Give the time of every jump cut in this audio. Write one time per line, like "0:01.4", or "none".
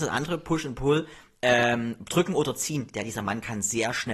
none